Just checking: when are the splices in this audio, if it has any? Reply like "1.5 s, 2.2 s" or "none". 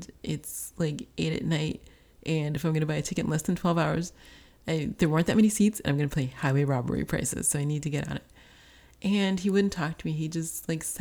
none